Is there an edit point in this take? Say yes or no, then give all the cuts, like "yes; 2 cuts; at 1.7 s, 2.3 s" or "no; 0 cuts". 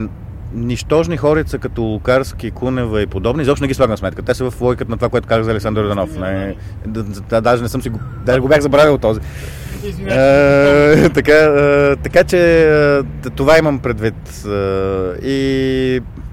no; 0 cuts